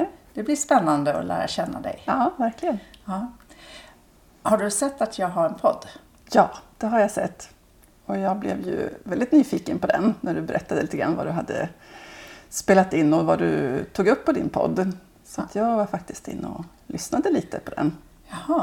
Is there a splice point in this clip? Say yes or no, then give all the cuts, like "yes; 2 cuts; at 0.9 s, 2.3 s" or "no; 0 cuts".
no; 0 cuts